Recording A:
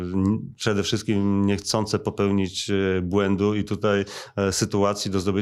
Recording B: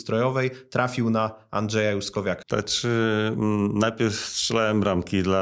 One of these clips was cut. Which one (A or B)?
B